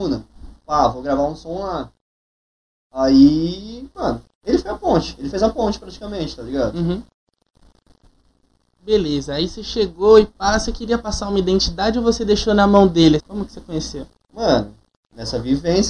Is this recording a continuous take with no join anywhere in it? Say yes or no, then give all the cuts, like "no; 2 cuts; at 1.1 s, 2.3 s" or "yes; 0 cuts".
no; 1 cut; at 13.2 s